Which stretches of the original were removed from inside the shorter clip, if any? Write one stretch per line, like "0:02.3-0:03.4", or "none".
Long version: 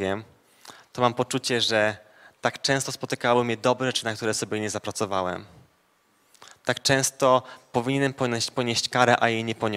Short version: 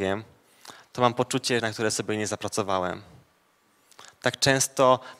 0:01.6-0:04.0